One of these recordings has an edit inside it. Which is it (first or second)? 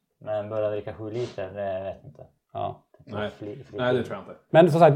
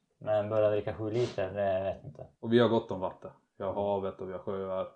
second